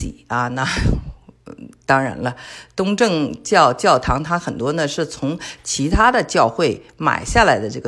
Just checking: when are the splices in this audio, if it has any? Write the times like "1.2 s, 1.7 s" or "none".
none

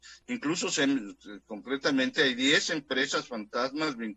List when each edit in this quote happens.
none

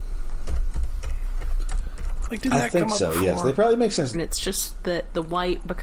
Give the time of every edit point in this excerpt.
2.3 s, 4.1 s

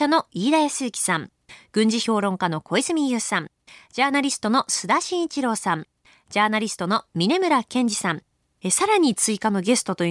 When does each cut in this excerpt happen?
8.6 s

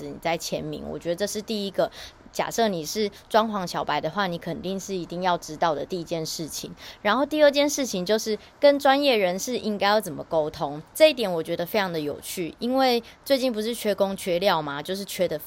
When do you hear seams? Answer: 10.9 s

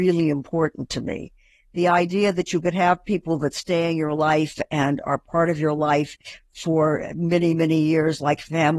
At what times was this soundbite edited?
none

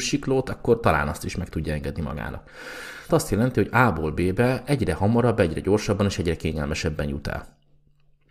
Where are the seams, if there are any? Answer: 3.1 s

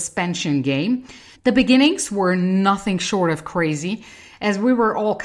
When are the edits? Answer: 1.3 s

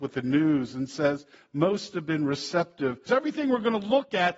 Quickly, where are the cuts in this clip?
3.1 s

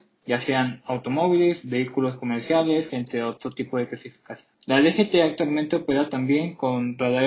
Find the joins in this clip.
2.9 s, 4.5 s

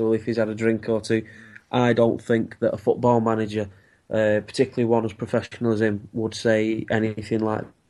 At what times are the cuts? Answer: none

